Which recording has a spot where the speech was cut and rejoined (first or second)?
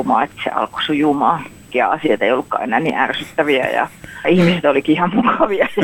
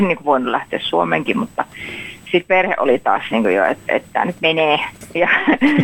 second